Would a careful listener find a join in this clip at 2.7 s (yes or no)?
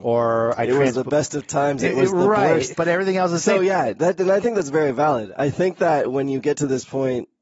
yes